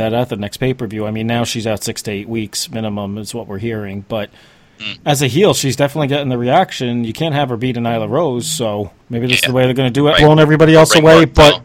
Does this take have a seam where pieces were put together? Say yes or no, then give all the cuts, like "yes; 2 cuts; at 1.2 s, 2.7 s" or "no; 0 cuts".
yes; 2 cuts; at 9.0 s, 10.1 s